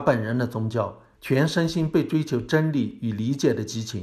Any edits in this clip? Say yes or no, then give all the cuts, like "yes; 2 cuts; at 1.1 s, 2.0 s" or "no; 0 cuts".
yes; 1 cut; at 1.2 s